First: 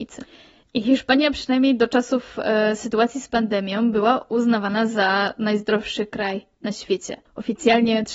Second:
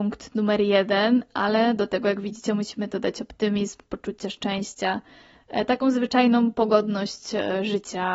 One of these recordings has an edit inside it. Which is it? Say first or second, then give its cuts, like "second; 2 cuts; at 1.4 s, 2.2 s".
first; 1 cut; at 7.3 s